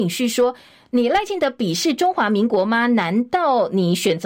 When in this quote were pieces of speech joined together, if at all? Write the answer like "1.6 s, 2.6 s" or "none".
none